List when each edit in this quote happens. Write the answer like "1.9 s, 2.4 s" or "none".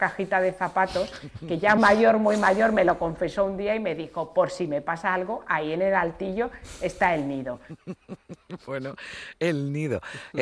1.8 s